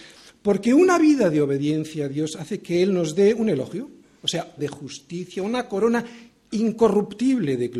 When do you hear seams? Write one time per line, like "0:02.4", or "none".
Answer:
0:04.6